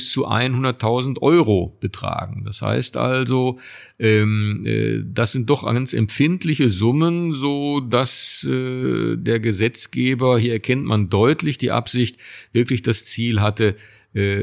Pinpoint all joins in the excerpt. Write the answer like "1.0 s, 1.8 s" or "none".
none